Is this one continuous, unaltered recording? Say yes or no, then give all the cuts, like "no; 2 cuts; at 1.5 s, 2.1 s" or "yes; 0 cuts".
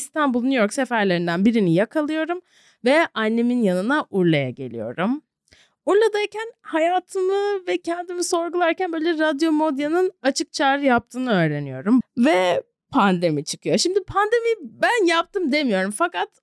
no; 1 cut; at 12.0 s